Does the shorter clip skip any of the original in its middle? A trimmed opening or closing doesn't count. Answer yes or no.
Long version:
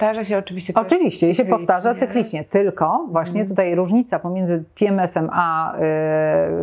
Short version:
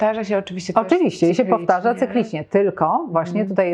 no